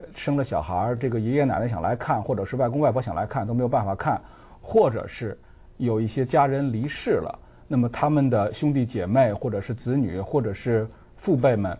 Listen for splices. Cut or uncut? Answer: uncut